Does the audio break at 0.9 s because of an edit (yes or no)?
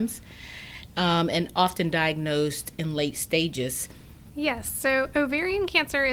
no